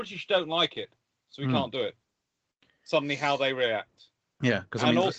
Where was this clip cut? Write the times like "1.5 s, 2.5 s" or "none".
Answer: none